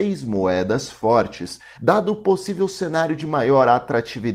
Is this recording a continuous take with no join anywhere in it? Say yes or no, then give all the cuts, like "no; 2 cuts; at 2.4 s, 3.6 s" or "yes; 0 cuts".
no; 1 cut; at 1.8 s